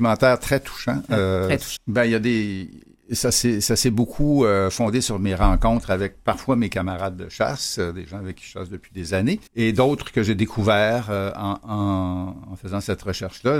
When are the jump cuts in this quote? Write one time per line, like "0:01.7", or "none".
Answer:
0:01.8
0:09.5